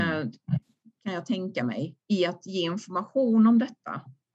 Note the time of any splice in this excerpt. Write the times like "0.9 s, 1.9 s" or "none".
2.0 s